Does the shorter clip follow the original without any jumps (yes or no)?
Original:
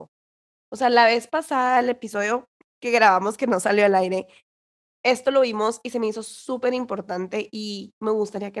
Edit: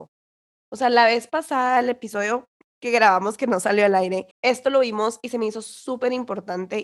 no